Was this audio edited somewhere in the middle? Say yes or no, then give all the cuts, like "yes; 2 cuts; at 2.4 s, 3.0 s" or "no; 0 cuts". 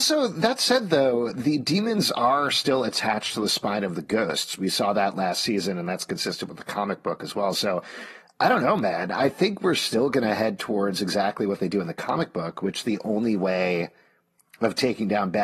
no; 0 cuts